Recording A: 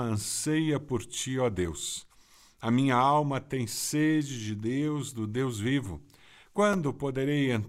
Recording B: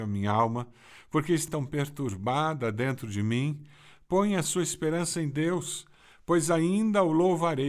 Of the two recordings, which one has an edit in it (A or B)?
B